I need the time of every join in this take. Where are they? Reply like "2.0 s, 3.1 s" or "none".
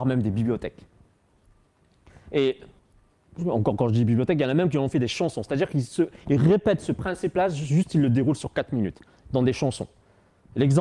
none